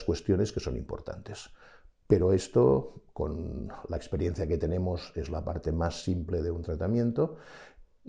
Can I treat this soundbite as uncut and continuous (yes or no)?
yes